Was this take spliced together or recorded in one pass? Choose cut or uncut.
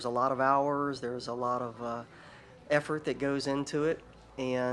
uncut